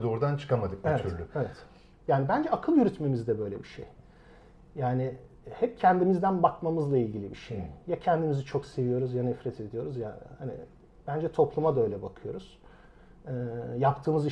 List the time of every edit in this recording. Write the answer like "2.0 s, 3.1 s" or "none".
none